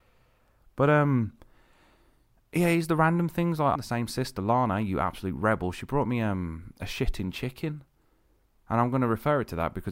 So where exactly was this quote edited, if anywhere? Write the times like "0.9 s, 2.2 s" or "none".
3.7 s